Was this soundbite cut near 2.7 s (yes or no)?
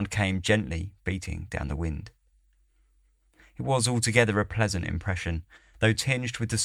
no